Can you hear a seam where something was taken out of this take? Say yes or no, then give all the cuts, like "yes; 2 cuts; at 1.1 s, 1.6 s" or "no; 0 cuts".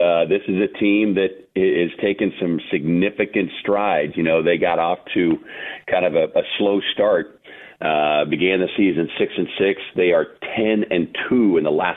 no; 0 cuts